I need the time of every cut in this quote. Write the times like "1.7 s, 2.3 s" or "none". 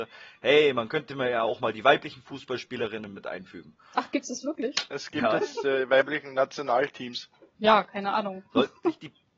4.9 s, 7.5 s